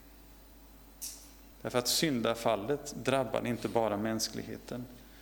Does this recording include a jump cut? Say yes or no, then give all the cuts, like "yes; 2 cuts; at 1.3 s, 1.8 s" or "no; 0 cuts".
yes; 1 cut; at 1.5 s